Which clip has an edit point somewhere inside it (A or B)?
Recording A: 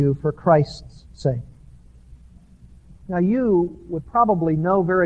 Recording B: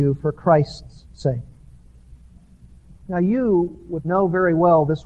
B